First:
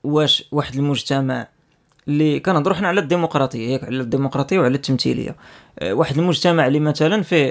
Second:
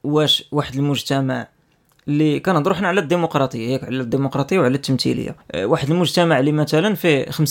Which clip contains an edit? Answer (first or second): second